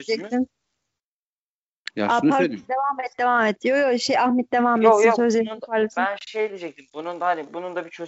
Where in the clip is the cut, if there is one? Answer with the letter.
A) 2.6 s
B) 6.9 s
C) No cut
C